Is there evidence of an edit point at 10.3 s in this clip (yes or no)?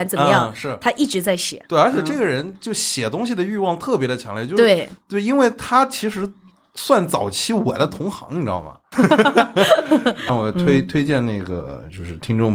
yes